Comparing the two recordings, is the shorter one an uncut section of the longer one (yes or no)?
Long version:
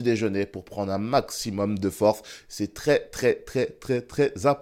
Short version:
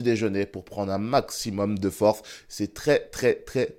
yes